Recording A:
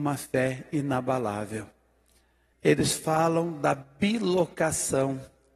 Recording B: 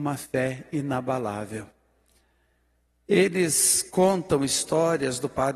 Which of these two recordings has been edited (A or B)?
A